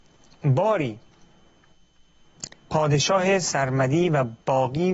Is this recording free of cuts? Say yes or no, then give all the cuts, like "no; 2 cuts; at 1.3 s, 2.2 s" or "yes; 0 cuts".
no; 1 cut; at 2.6 s